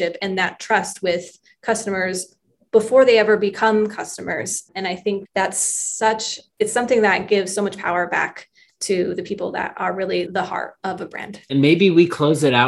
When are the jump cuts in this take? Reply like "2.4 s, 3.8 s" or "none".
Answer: 11.5 s